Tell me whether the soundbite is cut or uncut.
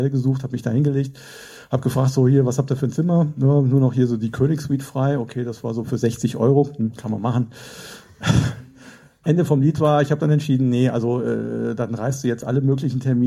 cut